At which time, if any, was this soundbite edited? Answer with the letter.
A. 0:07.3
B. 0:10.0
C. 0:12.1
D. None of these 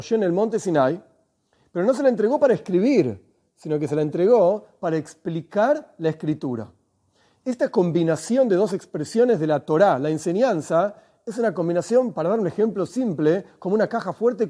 D